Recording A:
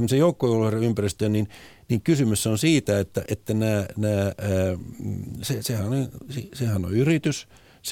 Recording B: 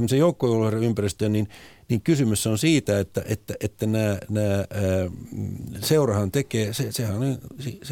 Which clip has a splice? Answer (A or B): A